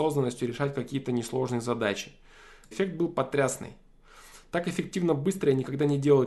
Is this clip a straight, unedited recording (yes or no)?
no